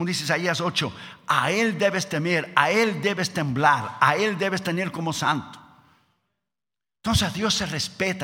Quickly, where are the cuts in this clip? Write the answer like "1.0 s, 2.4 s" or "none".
none